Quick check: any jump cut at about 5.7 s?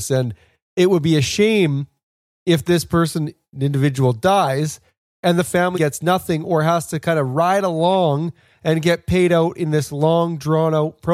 yes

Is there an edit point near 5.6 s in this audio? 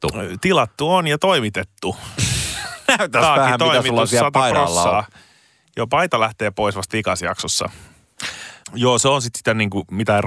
no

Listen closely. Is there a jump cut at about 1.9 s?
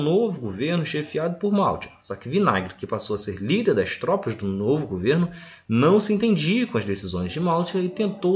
no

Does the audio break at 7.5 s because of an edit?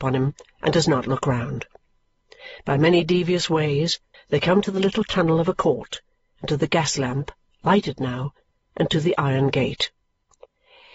no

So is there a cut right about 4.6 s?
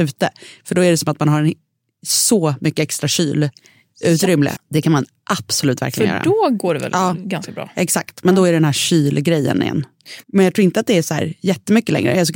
yes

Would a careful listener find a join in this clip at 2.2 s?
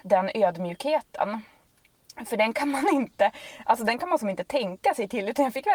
no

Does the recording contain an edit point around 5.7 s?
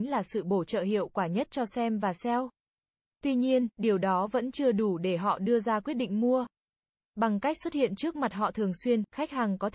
no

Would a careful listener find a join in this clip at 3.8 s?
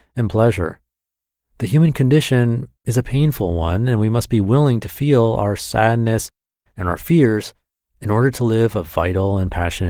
no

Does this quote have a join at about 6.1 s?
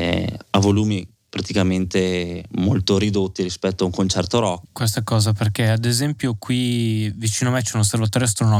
no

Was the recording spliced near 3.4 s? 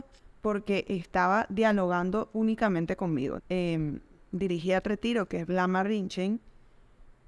yes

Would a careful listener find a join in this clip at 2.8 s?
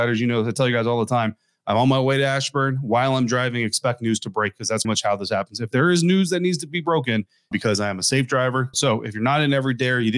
no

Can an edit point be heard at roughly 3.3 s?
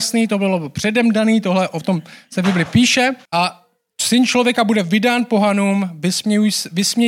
yes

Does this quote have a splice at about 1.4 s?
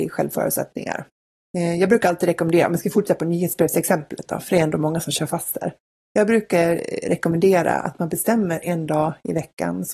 yes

